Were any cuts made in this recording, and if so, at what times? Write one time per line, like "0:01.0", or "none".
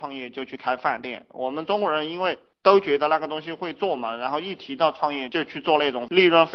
none